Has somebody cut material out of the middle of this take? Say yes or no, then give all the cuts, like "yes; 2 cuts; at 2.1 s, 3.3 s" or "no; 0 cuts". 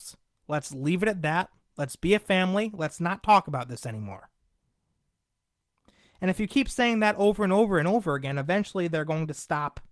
no; 0 cuts